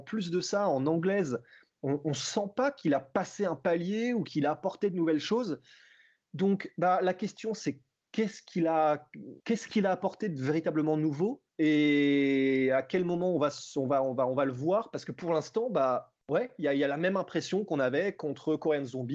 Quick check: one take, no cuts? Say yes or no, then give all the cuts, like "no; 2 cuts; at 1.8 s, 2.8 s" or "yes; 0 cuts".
no; 3 cuts; at 9.4 s, 11.5 s, 16.2 s